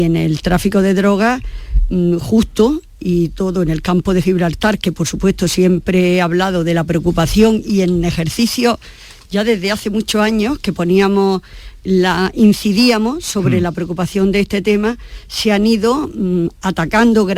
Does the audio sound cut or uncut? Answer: uncut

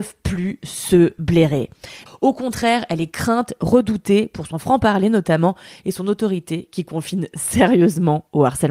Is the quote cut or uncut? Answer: cut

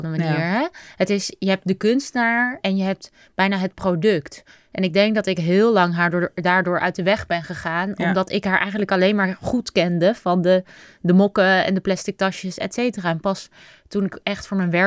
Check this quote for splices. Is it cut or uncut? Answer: uncut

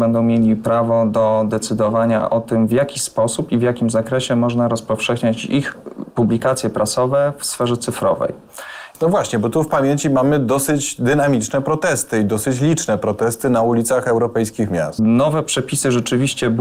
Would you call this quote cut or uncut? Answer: cut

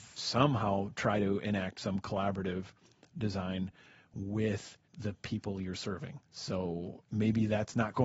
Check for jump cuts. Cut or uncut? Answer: cut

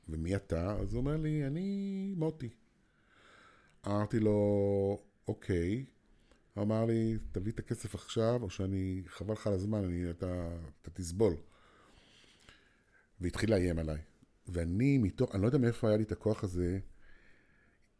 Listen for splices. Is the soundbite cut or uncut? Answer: uncut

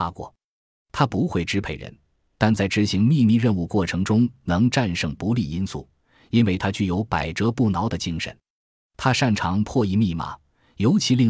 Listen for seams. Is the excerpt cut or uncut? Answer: uncut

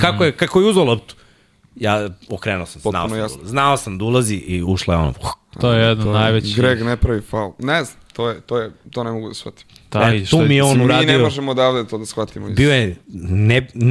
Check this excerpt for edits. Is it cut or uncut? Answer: uncut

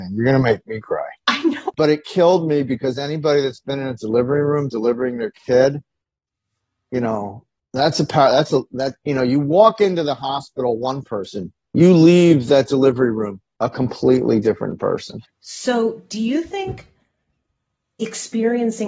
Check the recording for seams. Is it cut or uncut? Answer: cut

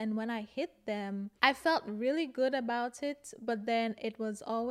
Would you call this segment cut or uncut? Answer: uncut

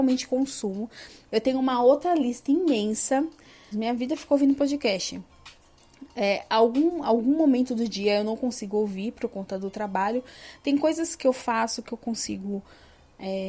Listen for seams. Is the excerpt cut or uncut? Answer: cut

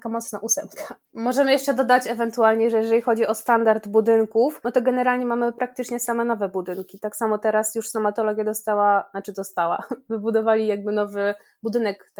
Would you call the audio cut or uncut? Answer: uncut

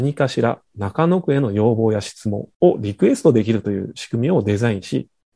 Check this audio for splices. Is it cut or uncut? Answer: cut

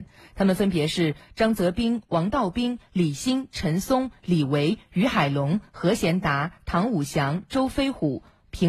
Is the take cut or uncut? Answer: uncut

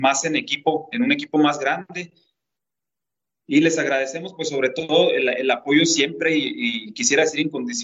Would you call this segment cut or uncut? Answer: uncut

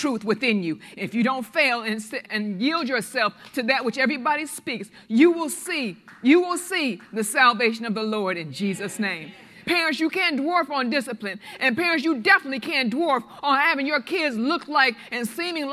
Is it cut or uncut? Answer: cut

